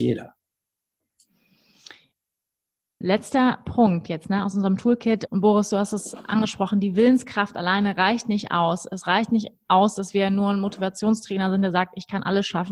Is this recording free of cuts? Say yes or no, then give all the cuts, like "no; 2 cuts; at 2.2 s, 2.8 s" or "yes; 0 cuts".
no; 2 cuts; at 3.0 s, 5.3 s